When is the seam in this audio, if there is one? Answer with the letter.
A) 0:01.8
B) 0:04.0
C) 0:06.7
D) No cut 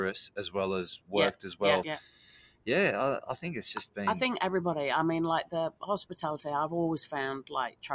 A